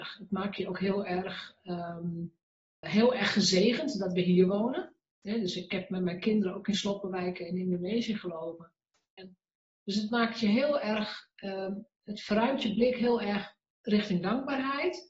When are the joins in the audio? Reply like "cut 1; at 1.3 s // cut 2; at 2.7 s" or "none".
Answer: cut 1; at 2.8 s // cut 2; at 9.2 s